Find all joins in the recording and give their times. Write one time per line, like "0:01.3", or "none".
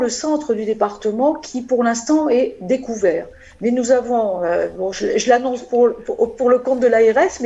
none